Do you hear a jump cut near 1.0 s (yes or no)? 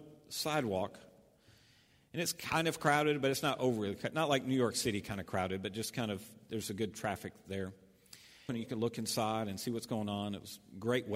no